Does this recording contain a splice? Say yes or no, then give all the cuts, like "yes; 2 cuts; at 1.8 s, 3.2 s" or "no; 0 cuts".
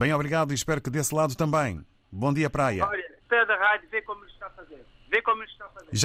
yes; 1 cut; at 3.2 s